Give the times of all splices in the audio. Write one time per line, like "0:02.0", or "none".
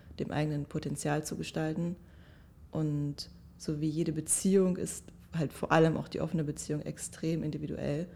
none

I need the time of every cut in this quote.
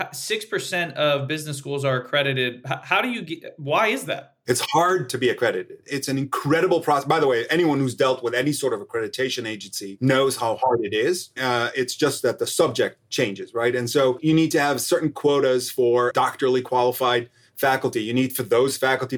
0:11.4

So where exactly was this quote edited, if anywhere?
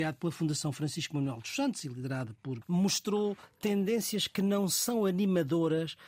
0:02.6

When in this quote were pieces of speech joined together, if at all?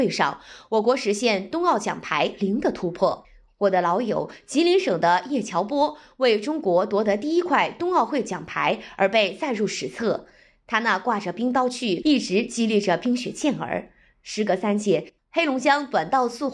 0:12.0
0:15.2

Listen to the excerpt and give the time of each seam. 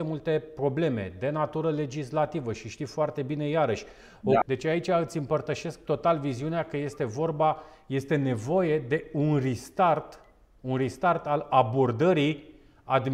0:04.4

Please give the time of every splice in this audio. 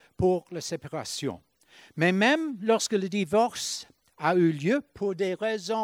none

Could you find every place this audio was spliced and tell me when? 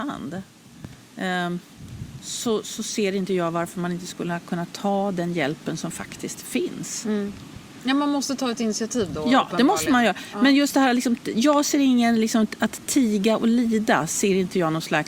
none

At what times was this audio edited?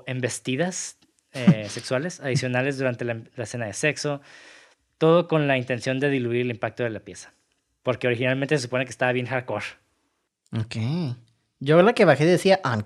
none

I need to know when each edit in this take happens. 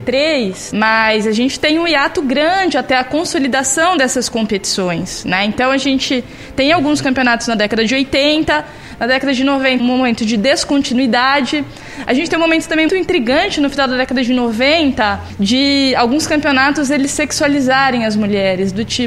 0:09.8
0:12.9

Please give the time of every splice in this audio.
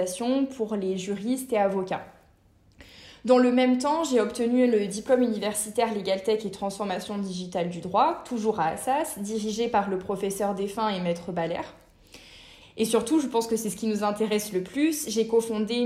0:12.6

